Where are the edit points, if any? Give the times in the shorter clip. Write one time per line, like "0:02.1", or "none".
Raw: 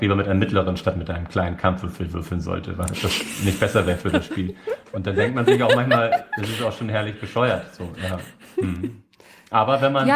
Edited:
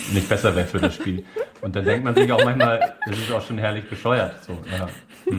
none